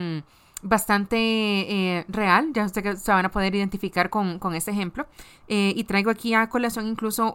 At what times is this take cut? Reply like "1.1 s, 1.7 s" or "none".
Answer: none

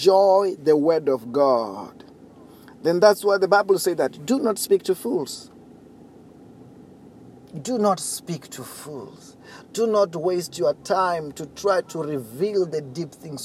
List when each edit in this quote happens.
none

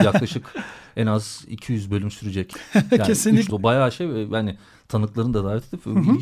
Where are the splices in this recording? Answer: 3.5 s

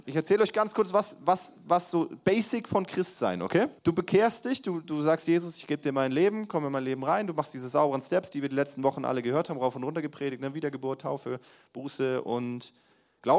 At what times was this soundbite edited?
3.8 s

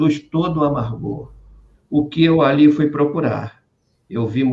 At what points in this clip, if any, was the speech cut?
1.7 s

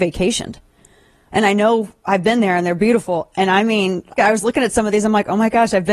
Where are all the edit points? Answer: 4.2 s

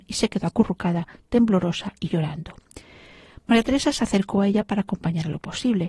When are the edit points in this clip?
none

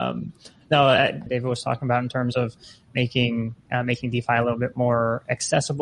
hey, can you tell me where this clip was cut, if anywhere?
1.3 s

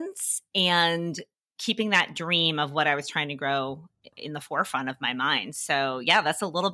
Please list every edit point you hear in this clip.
4.1 s

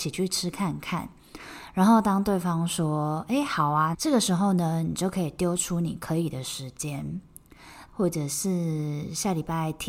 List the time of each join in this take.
3.9 s, 7.9 s

